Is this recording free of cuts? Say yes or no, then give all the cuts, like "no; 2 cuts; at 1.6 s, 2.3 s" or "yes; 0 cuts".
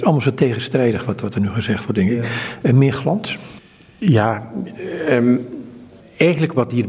yes; 0 cuts